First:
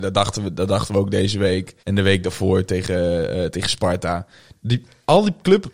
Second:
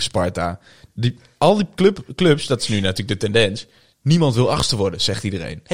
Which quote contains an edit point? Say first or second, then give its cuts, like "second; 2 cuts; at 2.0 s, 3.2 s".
first; 1 cut; at 1.8 s